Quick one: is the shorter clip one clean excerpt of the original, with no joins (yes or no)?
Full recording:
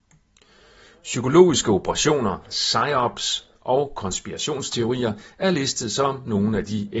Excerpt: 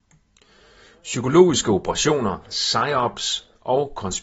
yes